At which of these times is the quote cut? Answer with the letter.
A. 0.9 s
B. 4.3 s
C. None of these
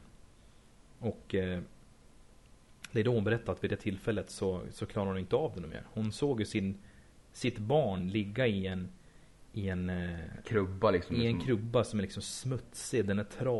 C